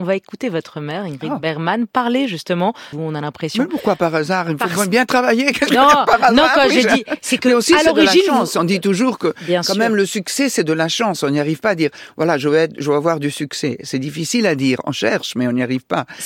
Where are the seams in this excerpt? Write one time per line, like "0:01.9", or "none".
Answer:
0:02.9